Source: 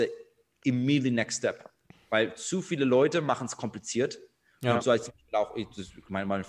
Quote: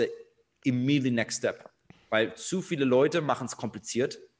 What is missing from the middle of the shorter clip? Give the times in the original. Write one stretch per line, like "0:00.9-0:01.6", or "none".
none